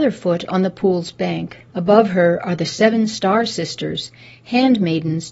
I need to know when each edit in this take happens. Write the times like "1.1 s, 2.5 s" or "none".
1.7 s